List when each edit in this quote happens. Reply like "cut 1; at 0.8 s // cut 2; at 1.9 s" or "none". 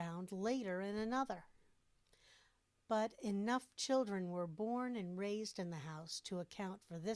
none